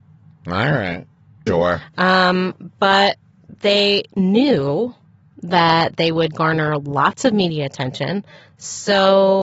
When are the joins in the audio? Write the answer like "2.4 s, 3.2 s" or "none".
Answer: 1.5 s